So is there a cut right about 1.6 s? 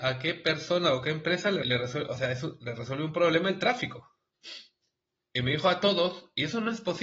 yes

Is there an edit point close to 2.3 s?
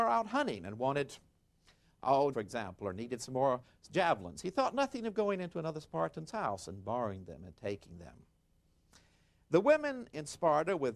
yes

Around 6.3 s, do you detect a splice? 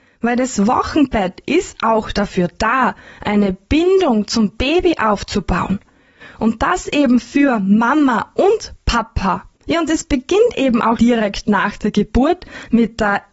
no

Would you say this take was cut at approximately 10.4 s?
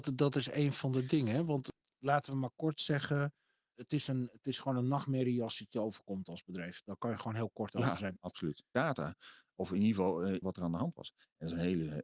yes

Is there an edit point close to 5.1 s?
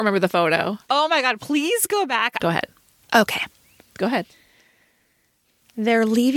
no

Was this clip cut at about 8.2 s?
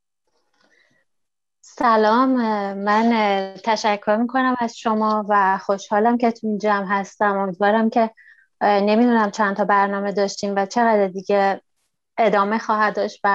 no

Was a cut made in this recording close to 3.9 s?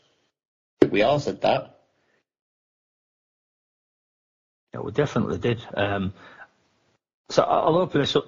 no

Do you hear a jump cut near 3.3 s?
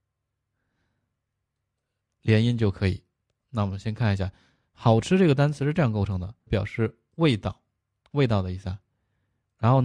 yes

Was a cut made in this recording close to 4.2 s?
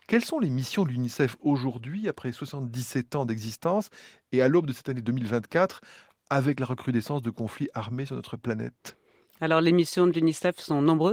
no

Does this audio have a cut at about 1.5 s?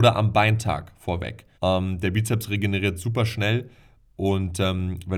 yes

